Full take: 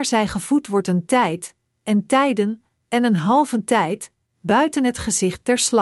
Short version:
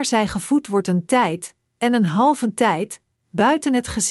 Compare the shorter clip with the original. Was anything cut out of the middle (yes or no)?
yes